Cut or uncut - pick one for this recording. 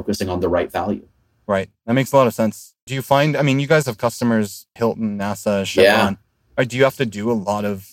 cut